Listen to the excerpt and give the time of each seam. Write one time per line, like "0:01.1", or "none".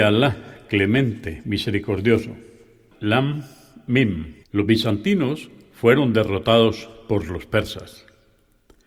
0:02.9
0:04.4